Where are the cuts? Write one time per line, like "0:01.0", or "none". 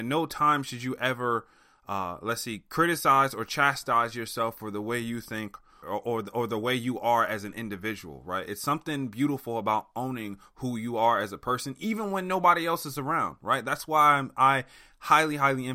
0:05.8